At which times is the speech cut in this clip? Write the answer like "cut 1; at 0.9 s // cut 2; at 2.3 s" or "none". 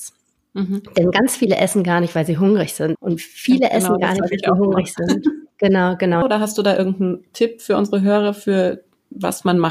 cut 1; at 2.9 s // cut 2; at 6.2 s